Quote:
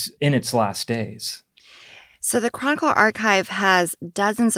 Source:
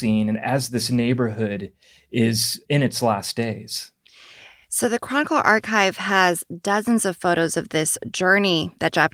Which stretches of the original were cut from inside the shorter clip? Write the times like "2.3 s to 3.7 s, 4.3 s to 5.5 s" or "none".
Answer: none